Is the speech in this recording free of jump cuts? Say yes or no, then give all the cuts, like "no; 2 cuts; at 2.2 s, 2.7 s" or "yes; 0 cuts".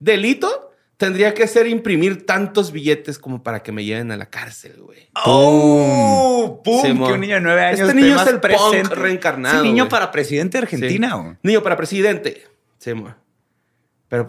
yes; 0 cuts